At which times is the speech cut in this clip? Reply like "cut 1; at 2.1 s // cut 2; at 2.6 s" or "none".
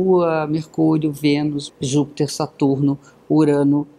cut 1; at 1.7 s